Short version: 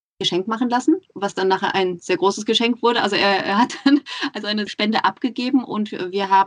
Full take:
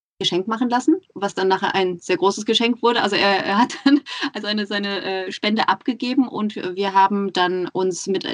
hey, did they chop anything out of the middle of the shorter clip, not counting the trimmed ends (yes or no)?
yes